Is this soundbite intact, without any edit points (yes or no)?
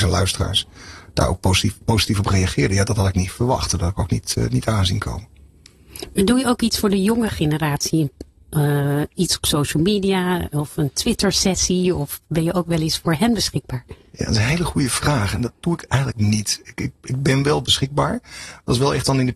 yes